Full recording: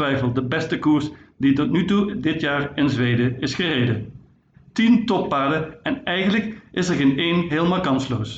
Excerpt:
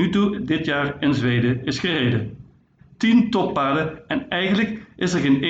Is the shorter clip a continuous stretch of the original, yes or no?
yes